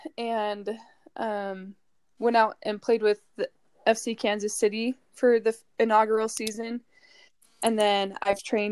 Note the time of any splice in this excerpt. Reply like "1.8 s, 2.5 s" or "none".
none